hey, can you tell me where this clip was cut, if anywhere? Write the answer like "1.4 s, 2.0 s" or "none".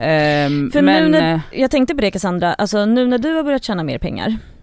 1.5 s